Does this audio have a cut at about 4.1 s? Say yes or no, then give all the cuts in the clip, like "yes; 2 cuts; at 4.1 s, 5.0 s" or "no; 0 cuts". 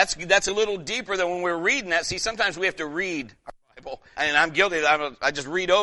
yes; 1 cut; at 4.1 s